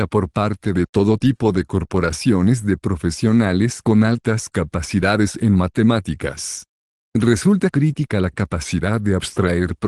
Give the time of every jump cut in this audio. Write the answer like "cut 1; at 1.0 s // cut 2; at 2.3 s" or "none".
none